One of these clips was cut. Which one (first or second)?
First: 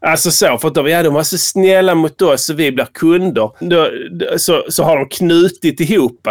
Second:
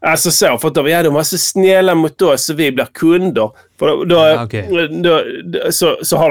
first